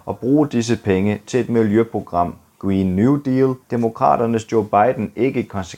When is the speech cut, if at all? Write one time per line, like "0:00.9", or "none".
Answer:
0:03.6